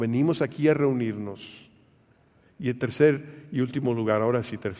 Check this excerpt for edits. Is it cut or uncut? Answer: uncut